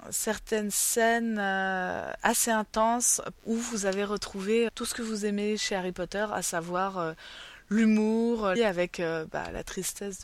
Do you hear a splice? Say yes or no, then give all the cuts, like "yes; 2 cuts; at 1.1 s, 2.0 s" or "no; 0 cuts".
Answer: yes; 3 cuts; at 3.4 s, 4.7 s, 8.6 s